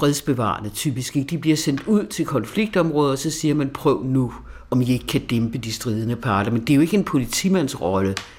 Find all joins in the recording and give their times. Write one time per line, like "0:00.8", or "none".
none